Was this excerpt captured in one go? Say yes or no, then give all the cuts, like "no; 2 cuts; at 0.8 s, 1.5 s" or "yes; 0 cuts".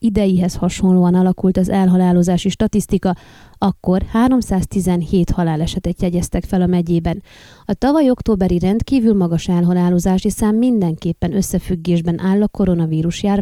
yes; 0 cuts